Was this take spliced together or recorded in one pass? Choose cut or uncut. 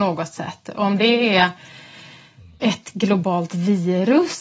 uncut